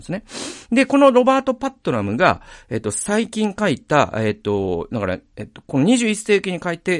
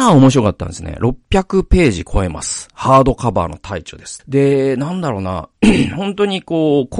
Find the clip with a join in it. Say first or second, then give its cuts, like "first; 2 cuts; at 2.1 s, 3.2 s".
second; 1 cut; at 4.2 s